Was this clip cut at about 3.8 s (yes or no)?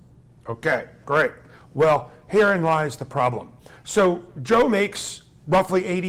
yes